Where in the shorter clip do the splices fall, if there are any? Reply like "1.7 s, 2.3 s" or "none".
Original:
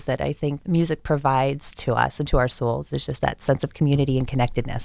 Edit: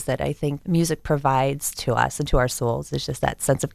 none